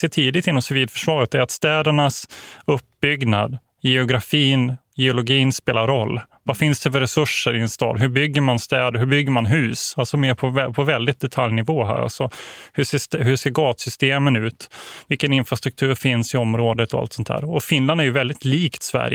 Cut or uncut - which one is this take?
uncut